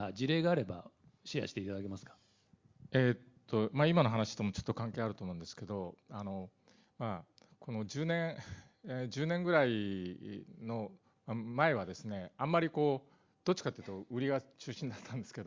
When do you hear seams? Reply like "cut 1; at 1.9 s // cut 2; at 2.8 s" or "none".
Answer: none